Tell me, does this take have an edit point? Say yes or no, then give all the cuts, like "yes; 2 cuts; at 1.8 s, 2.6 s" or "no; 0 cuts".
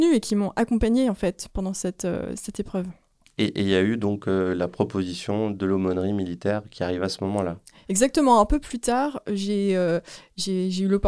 no; 0 cuts